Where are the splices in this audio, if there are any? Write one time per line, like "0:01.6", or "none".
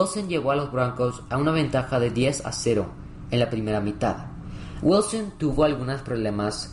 0:04.8